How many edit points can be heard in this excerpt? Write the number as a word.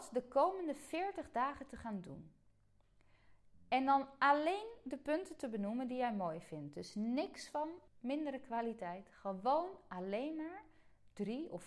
one